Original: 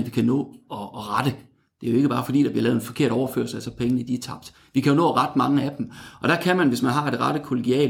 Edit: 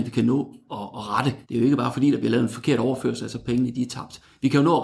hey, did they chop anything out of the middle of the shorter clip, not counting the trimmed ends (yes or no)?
yes